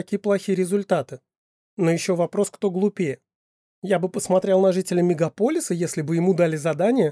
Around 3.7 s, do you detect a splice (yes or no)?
no